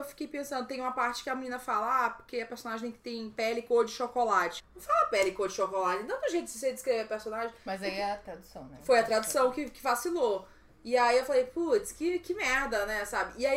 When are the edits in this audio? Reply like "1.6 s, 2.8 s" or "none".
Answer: 4.6 s